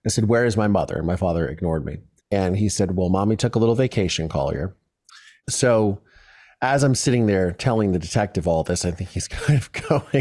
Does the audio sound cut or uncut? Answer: cut